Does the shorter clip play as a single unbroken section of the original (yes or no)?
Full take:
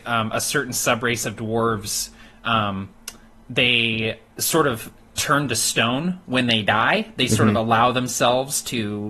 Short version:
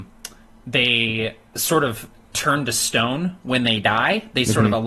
yes